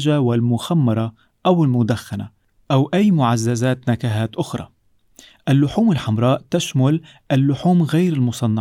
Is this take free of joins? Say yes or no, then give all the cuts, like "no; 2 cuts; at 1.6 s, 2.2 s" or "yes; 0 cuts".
yes; 0 cuts